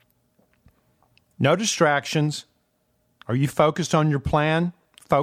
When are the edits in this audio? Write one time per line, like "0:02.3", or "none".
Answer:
0:03.2